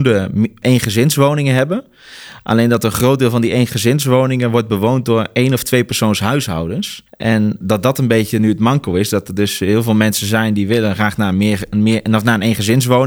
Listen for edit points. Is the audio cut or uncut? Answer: cut